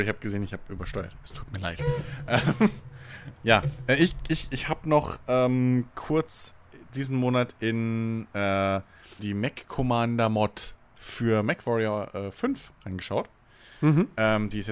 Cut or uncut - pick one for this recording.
cut